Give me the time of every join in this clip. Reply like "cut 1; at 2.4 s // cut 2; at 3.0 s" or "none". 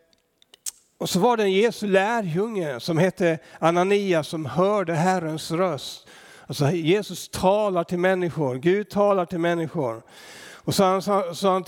none